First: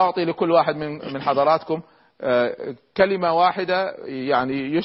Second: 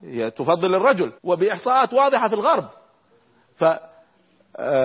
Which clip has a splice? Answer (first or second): second